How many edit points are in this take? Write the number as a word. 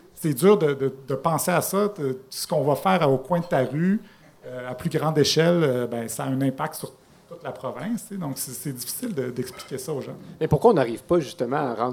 zero